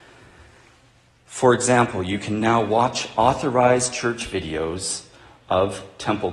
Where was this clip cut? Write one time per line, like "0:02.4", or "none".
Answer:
none